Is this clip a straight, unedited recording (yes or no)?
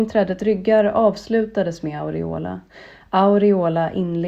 yes